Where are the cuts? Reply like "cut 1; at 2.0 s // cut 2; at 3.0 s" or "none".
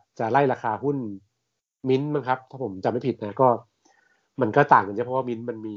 none